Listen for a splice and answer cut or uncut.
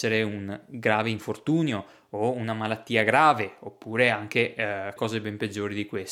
cut